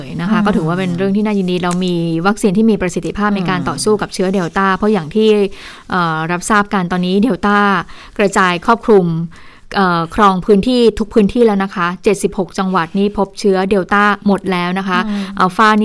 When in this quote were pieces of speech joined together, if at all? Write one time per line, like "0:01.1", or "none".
none